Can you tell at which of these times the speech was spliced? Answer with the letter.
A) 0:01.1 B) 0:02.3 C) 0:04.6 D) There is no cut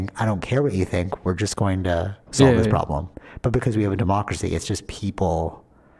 B